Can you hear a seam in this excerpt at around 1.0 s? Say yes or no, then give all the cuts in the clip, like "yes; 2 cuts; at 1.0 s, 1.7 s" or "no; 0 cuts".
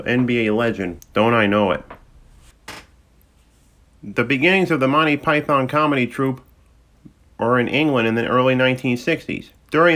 yes; 1 cut; at 1.0 s